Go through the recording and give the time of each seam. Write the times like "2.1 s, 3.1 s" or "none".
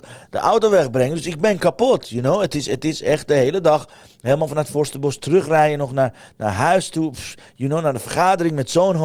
none

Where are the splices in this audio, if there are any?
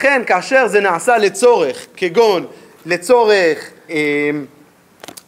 3.9 s

